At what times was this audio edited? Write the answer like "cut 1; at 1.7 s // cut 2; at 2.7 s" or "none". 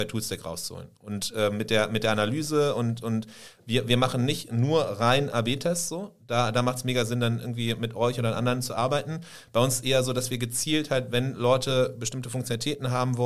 none